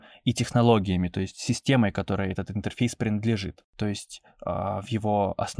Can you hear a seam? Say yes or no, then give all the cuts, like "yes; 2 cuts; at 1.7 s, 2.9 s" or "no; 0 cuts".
yes; 1 cut; at 3.7 s